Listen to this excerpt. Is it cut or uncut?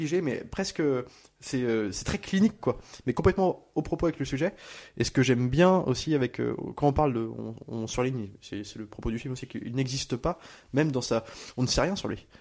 cut